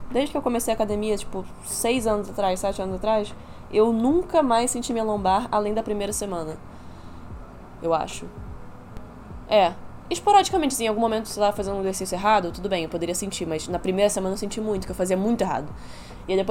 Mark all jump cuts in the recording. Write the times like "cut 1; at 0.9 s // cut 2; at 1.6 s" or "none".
none